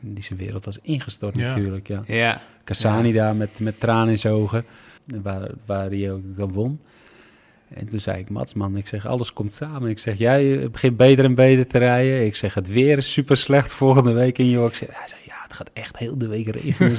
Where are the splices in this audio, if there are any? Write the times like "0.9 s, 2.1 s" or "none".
5.0 s